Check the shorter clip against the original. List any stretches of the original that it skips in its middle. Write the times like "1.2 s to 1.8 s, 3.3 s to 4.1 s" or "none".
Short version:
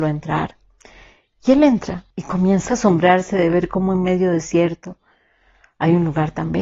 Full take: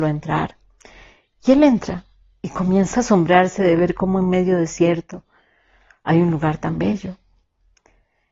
2.1 s to 2.4 s